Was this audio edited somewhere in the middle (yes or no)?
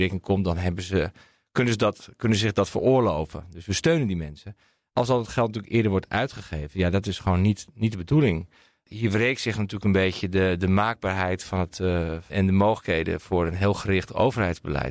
yes